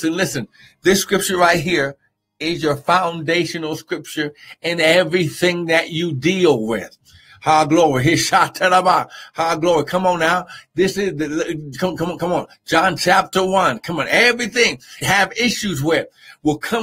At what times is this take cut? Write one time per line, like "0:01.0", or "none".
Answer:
0:15.0